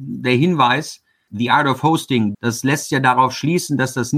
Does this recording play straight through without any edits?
no; 2 cuts; at 1.3 s, 2.3 s

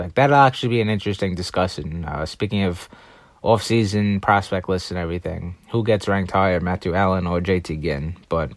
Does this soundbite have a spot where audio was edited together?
no; 0 cuts

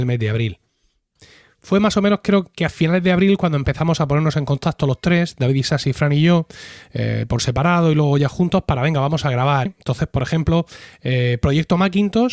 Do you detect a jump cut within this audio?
yes; 1 cut; at 9.7 s

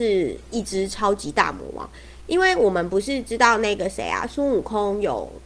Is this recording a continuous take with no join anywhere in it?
yes; 0 cuts

